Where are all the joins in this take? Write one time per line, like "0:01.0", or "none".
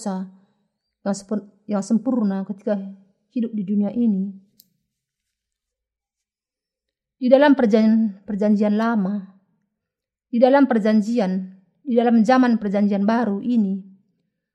none